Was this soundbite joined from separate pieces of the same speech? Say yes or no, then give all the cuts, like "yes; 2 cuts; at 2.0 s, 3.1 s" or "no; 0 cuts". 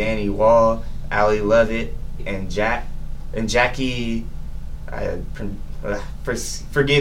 yes; 1 cut; at 2.2 s